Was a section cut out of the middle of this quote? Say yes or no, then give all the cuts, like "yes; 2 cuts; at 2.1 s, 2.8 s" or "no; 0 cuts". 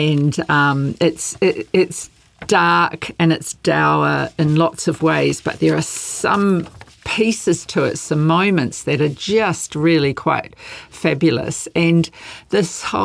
no; 0 cuts